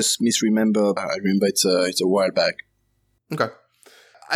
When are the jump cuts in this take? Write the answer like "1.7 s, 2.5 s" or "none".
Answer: 1.0 s